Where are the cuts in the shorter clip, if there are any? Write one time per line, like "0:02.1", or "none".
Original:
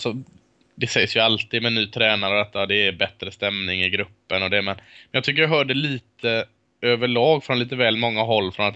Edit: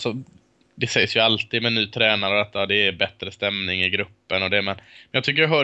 none